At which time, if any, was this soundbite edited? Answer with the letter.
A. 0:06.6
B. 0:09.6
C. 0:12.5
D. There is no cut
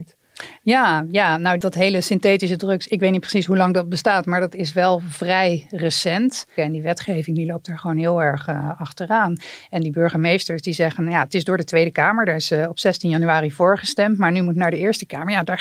A